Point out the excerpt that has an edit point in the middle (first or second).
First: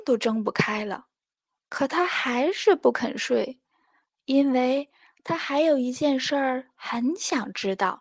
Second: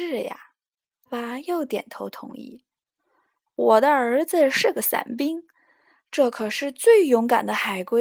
second